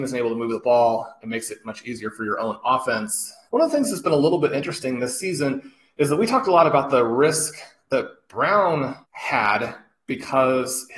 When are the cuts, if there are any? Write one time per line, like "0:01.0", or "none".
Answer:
0:03.5
0:09.0